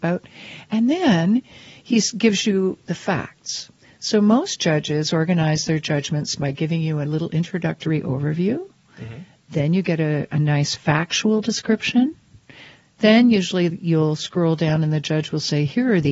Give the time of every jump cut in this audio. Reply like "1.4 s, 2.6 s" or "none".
none

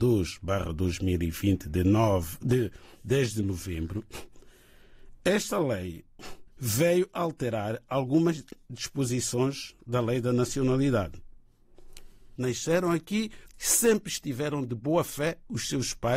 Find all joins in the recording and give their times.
6.5 s, 12.4 s, 13.5 s

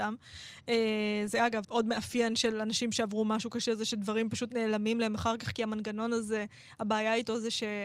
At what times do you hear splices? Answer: 1.6 s

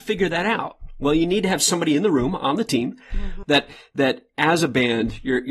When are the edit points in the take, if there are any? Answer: 3.4 s

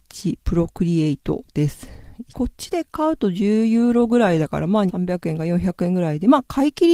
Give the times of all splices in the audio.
2.3 s, 4.9 s

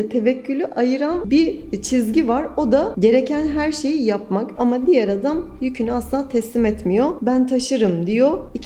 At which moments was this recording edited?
4.6 s

